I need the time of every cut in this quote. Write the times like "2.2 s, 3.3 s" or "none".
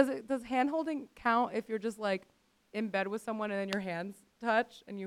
none